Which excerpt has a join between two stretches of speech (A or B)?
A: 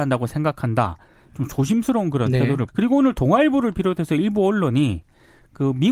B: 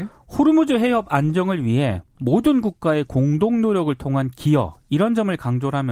A